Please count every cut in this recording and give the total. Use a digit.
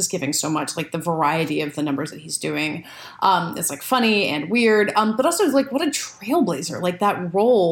0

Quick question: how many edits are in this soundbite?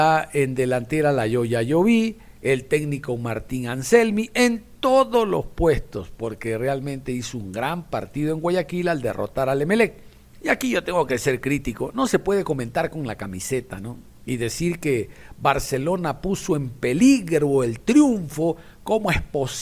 1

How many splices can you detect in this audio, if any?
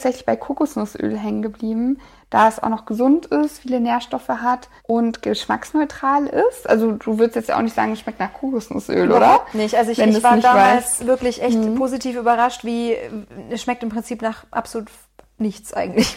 1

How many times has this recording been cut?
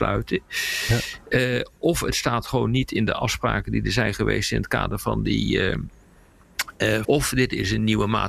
1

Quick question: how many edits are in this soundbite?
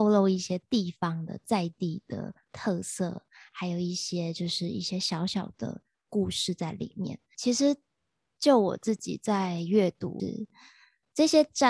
2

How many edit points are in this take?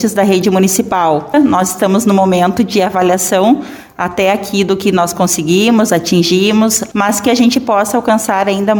2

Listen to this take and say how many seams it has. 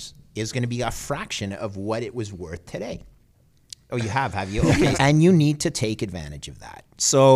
2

